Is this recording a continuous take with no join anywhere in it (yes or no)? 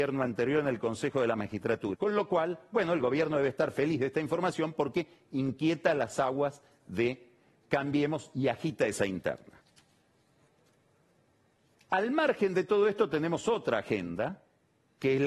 no